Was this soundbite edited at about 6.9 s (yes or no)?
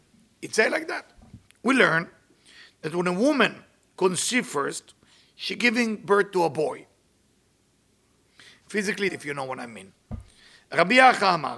no